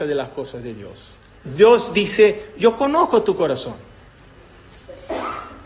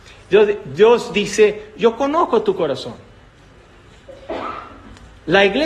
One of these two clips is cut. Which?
first; 1 cut; at 1.5 s

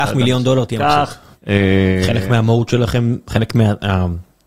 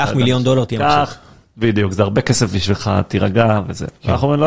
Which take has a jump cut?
first; 1 cut; at 1.3 s

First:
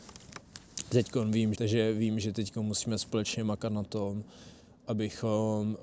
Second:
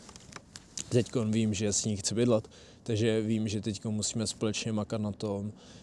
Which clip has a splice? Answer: first; 1 cut; at 1.5 s

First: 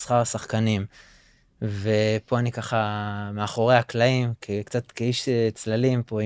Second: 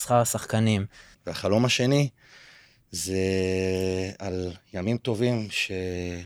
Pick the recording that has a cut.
second; 1 cut; at 1.1 s

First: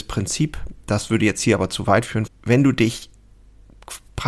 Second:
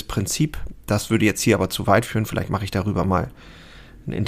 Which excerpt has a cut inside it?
first; 1 cut; at 2.3 s

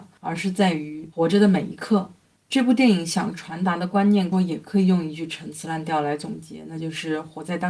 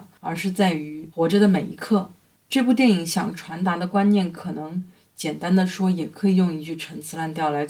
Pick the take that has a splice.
first; 1 cut; at 4.3 s

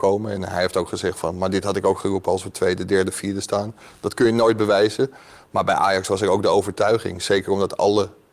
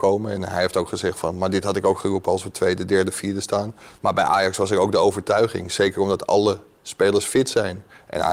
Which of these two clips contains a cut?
second; 1 cut; at 4.0 s

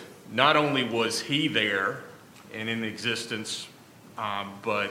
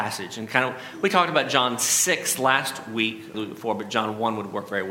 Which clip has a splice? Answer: second; 1 cut; at 3.3 s

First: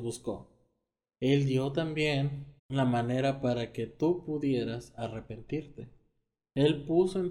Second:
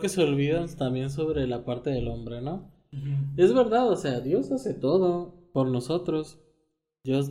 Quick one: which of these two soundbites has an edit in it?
first; 2 cuts; at 1.2 s, 2.6 s

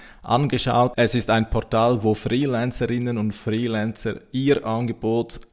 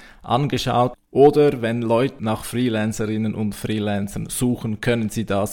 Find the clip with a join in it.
second; 2 cuts; at 0.9 s, 2.2 s

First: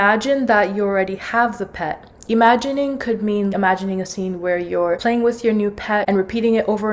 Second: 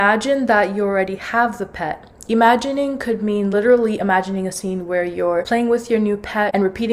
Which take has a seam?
first; 1 cut; at 3.5 s

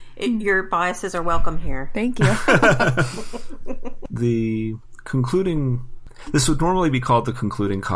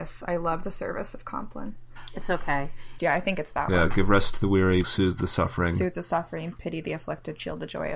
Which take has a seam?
second; 2 cuts; at 3.0 s, 4.8 s

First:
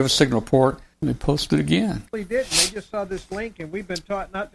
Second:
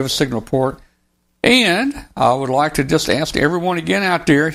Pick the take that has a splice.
first; 2 cuts; at 0.9 s, 2.1 s

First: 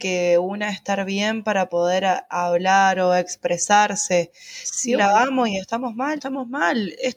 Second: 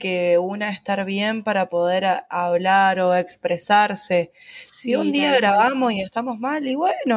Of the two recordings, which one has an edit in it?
first; 2 cuts; at 5.0 s, 6.2 s

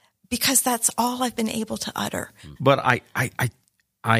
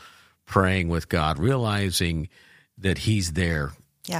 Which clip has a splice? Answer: first; 1 cut; at 2.6 s

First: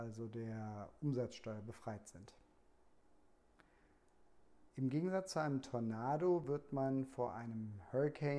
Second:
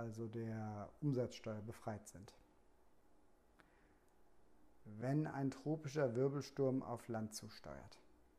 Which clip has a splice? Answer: first; 1 cut; at 4.7 s

